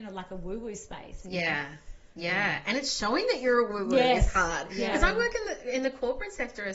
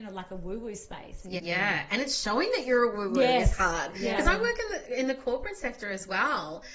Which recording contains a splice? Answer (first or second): second